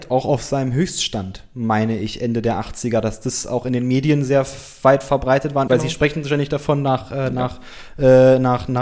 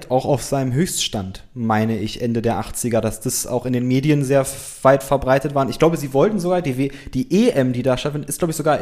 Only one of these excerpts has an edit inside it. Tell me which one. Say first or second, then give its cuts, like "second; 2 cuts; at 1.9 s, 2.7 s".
first; 1 cut; at 5.7 s